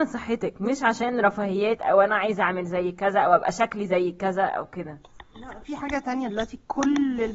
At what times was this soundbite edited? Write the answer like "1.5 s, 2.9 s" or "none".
5.6 s